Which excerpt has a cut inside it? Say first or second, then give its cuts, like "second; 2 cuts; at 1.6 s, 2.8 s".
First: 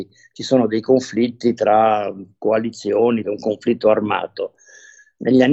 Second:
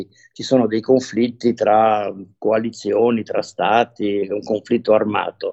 first; 1 cut; at 3.2 s